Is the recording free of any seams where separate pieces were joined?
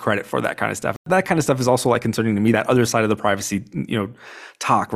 yes; 0 cuts

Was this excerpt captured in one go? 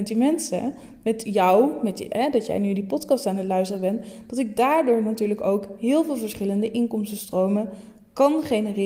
yes; 0 cuts

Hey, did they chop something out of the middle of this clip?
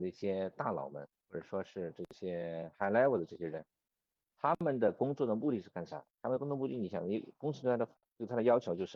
no; 0 cuts

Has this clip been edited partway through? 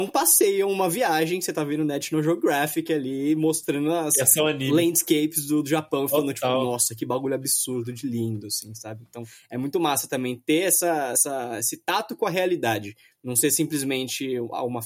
no; 0 cuts

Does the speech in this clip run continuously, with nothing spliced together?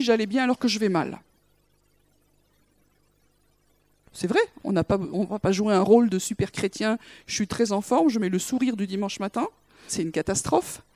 no; 1 cut; at 9.9 s

